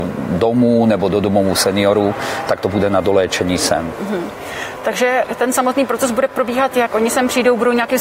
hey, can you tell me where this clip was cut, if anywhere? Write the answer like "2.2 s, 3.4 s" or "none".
none